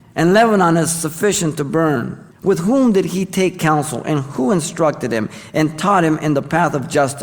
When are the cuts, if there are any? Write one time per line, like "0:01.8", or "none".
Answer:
0:02.3